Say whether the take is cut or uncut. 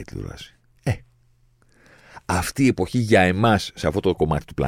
uncut